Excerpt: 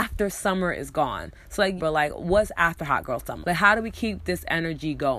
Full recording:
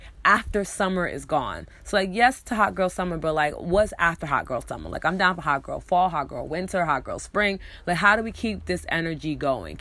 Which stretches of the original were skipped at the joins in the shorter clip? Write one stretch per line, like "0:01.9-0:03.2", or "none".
0:02.1-0:03.2
0:04.8-0:07.8